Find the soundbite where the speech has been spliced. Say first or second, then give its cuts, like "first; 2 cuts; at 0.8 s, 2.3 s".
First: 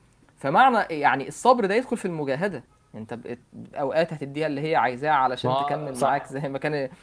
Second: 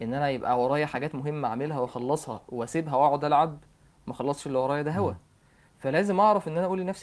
first; 1 cut; at 3.7 s